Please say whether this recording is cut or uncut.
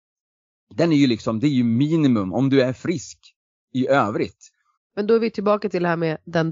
cut